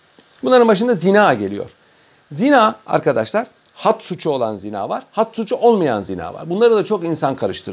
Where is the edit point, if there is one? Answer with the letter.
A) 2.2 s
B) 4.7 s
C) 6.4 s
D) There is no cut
D